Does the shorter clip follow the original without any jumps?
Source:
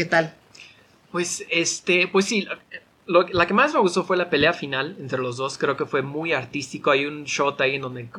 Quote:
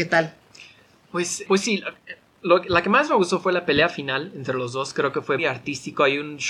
no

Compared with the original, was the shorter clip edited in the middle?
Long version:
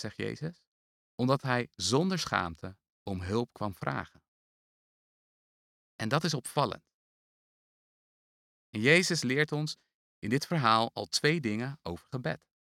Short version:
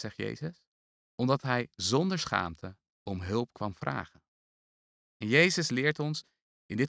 yes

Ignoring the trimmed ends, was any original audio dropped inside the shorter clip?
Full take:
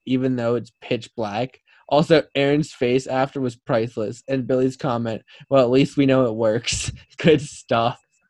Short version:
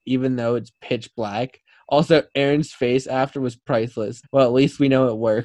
yes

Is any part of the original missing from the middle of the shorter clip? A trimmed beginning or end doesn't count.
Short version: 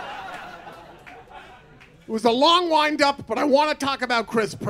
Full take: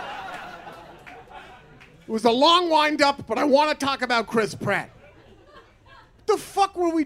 no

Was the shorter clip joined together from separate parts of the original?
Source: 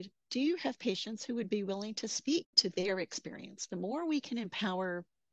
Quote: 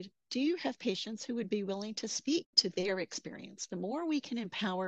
no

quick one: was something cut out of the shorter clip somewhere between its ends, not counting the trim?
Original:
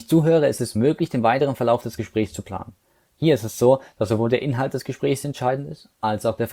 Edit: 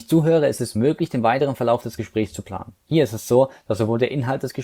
yes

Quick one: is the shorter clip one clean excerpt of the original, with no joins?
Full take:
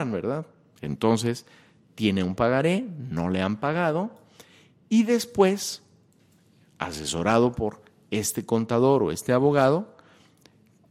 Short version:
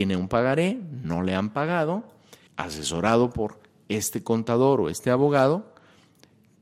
no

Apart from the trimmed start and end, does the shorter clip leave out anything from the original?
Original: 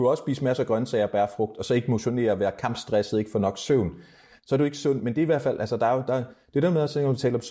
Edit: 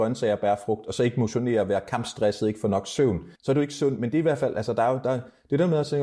yes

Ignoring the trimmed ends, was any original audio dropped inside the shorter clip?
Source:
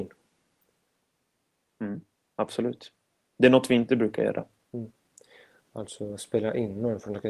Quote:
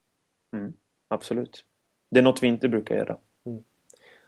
no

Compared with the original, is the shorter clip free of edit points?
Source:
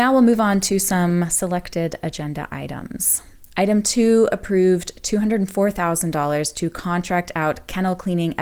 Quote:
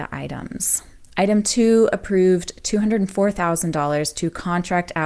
yes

